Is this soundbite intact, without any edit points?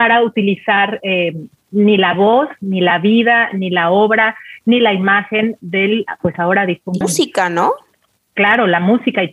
no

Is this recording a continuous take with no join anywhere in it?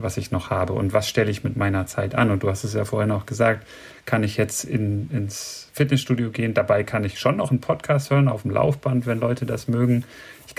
yes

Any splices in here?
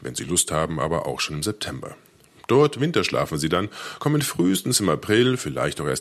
no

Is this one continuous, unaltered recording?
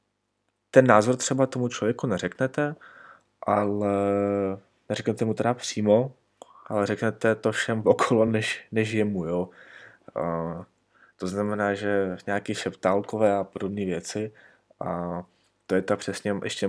yes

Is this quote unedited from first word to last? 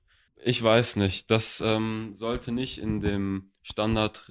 yes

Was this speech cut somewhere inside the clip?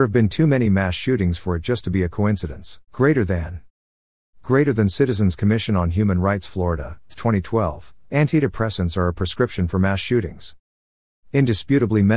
yes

